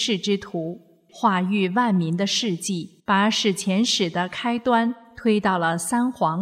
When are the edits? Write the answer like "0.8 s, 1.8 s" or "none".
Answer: 1.1 s, 3.0 s